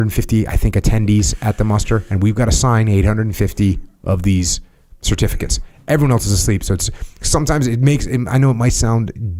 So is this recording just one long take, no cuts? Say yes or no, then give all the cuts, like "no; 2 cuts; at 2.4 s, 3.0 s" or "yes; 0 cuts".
yes; 0 cuts